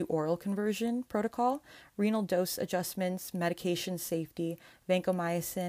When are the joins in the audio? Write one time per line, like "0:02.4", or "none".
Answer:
none